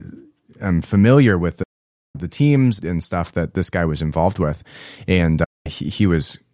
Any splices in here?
yes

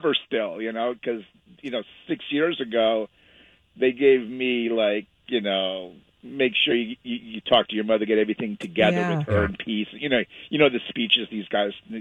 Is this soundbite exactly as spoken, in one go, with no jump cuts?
yes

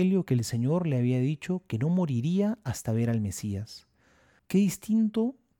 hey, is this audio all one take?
no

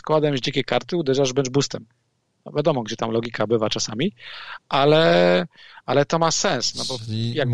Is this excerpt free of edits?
yes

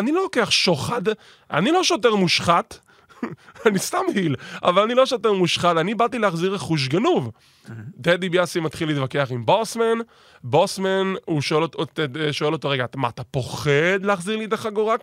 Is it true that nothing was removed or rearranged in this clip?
yes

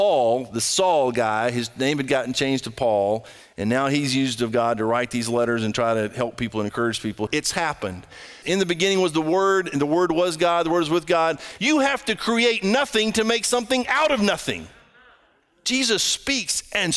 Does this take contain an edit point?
yes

